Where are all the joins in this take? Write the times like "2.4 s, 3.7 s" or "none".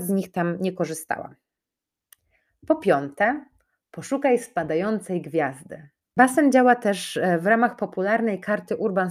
6.2 s